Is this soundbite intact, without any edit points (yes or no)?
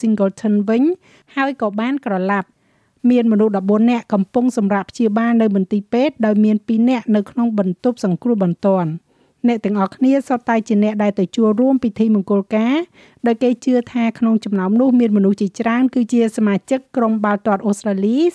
yes